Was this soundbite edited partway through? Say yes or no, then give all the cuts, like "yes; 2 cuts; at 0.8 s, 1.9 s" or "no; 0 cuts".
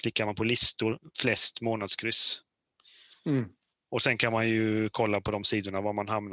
no; 0 cuts